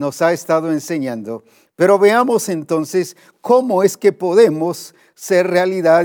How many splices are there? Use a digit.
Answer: 1